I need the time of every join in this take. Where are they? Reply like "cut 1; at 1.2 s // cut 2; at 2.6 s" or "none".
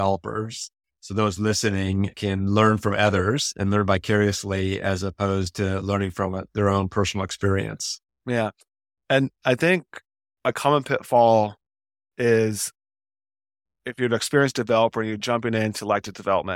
none